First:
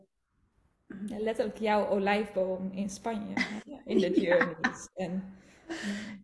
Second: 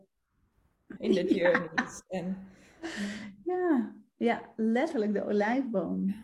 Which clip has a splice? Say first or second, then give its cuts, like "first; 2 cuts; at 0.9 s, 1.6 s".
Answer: second; 1 cut; at 1.0 s